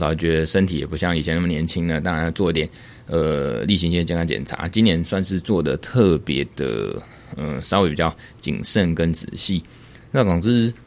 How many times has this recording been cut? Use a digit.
0